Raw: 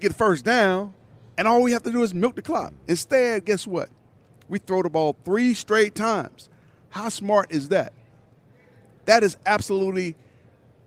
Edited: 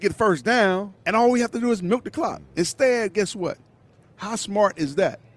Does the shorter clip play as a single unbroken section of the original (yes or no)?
no